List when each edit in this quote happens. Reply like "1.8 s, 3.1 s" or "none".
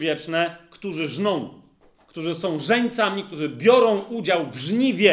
none